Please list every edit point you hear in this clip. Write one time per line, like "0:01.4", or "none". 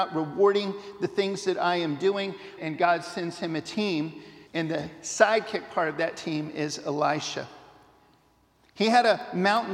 0:02.6
0:04.5